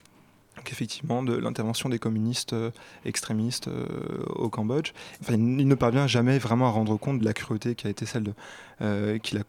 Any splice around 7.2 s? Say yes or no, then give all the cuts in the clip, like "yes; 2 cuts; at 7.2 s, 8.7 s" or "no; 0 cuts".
yes; 2 cuts; at 5.2 s, 7.2 s